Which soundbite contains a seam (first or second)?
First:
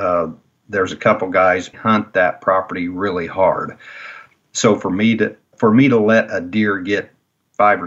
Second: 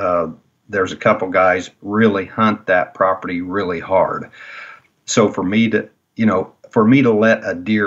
first